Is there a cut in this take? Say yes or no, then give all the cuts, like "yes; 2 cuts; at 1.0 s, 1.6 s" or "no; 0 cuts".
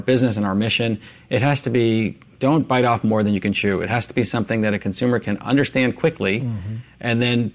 no; 0 cuts